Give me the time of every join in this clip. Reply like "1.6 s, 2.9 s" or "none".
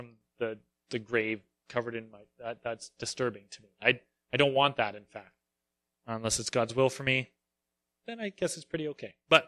none